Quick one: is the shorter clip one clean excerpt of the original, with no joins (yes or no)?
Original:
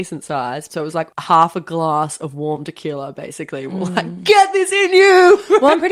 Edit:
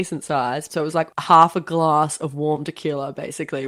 yes